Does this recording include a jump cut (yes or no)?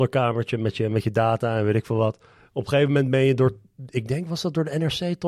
no